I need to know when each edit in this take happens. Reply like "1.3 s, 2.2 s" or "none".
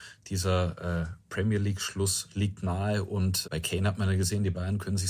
3.4 s

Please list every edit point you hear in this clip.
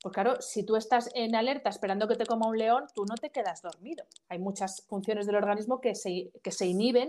4.9 s

